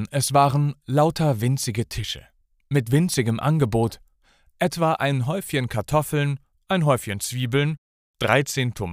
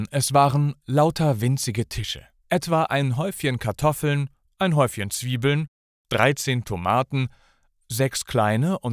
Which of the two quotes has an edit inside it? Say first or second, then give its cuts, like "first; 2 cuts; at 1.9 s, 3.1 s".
second; 1 cut; at 2.4 s